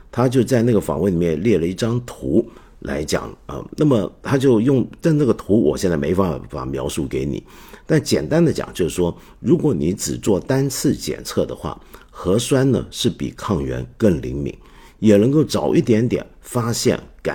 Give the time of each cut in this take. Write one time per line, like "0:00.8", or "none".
none